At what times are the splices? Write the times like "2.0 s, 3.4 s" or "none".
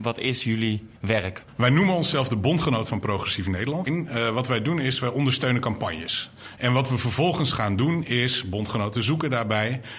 0.9 s, 3.9 s, 6.5 s